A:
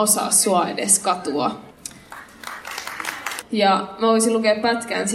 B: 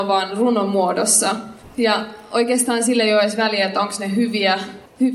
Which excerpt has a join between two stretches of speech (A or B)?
A